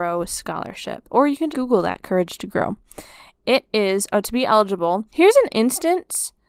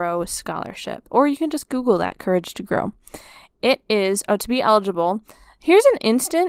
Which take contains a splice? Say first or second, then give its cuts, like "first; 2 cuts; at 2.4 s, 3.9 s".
first; 2 cuts; at 1.5 s, 5.1 s